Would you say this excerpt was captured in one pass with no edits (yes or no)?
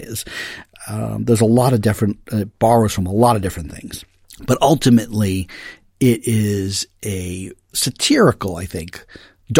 yes